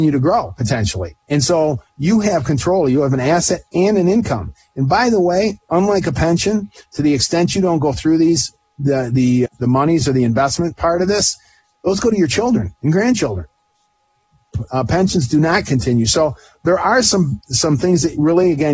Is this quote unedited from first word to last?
no; 2 cuts; at 1.2 s, 9.5 s

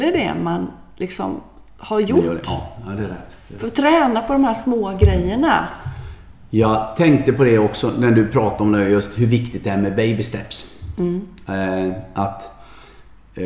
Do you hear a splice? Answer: no; 0 cuts

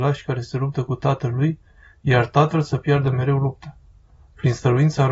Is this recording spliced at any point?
no; 0 cuts

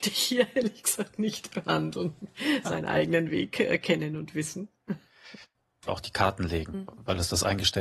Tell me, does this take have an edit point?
yes; 2 cuts; at 2.6 s, 5.9 s

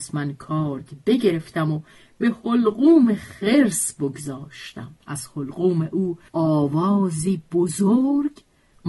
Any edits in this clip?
yes; 2 cuts; at 5.0 s, 6.3 s

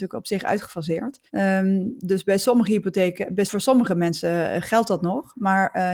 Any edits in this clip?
yes; 2 cuts; at 1.3 s, 3.5 s

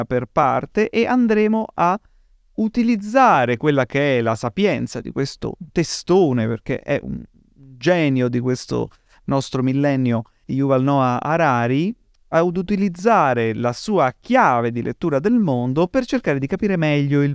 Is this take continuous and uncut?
no; 1 cut; at 10.4 s

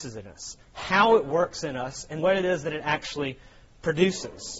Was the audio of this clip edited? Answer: yes; 1 cut; at 2.2 s

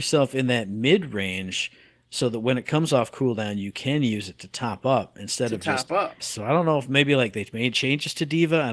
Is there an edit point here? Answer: yes; 1 cut; at 6.2 s

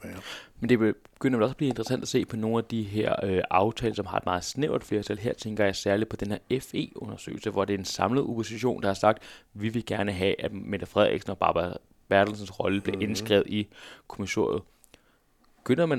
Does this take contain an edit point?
no; 0 cuts

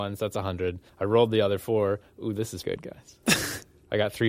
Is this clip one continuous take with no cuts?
no; 1 cut; at 2.6 s

